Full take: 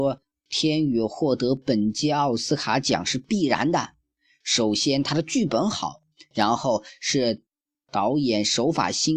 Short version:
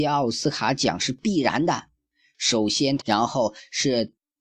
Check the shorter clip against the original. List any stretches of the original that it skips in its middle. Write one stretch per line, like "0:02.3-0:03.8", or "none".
0:05.0-0:06.3